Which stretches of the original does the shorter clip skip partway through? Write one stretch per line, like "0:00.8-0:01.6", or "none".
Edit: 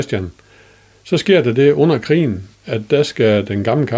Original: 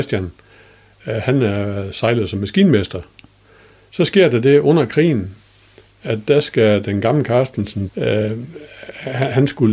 0:00.9-0:03.8
0:05.4-0:05.9